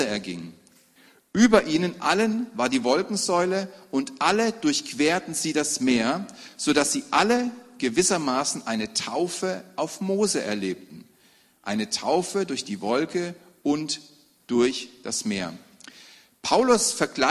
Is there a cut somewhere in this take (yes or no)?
no